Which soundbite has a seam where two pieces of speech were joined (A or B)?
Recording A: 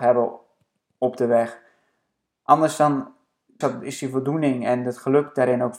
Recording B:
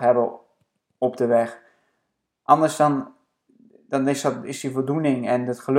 A